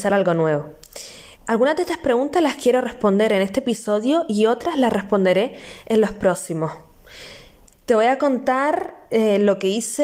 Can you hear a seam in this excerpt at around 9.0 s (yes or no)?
no